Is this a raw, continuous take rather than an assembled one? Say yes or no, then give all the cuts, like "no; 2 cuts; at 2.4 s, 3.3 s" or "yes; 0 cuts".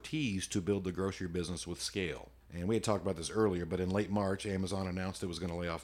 no; 1 cut; at 2.4 s